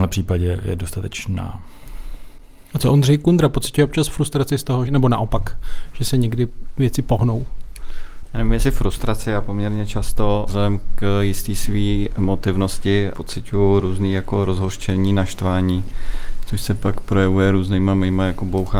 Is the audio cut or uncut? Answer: cut